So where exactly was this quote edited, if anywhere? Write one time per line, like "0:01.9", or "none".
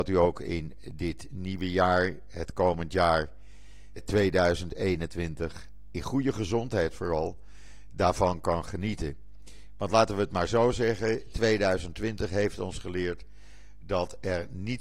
0:04.0